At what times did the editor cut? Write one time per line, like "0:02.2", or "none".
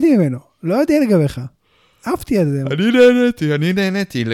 none